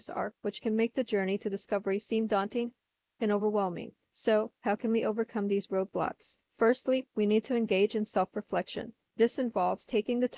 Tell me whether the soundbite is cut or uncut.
uncut